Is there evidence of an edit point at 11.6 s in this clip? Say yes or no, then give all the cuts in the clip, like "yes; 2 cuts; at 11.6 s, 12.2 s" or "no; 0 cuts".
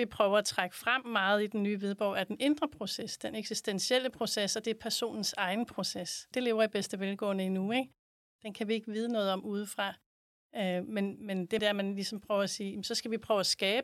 yes; 3 cuts; at 6.3 s, 8.4 s, 11.6 s